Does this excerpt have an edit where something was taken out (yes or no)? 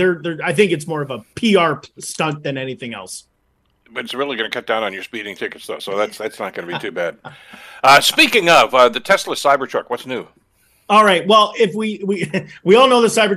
no